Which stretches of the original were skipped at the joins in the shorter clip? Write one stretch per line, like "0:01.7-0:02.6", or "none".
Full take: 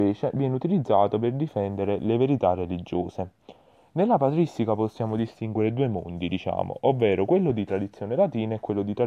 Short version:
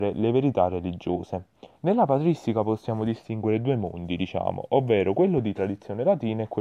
0:03.6-0:03.9

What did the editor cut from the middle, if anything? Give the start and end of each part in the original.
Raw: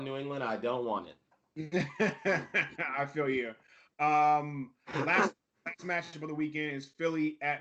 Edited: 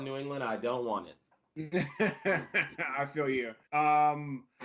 0:03.6-0:03.9

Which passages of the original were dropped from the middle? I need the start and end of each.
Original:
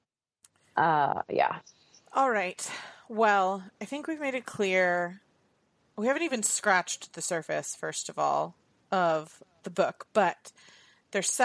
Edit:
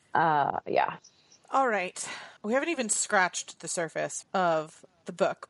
0:03.0-0:05.9
0:07.8-0:08.8

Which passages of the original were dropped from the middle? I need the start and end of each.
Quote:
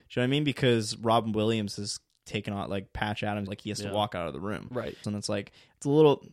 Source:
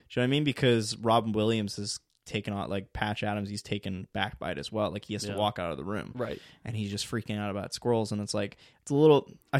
0:03.5-0:04.9
0:06.5-0:08.1

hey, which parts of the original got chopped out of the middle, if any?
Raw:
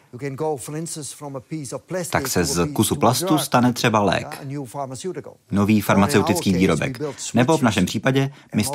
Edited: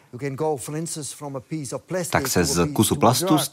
none

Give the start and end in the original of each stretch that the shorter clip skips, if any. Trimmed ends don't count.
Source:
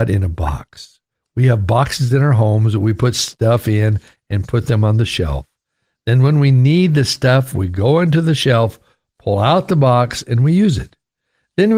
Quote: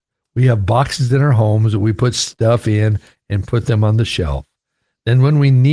none

